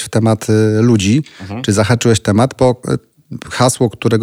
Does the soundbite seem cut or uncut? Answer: uncut